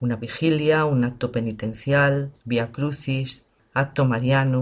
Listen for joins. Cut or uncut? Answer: cut